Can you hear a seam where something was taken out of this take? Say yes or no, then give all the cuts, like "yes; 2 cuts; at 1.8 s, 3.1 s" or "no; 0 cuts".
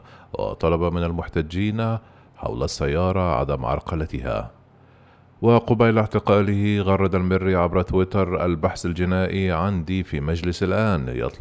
no; 0 cuts